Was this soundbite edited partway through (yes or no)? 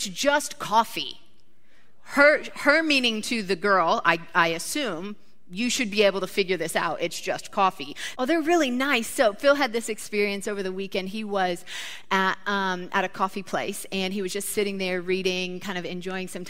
yes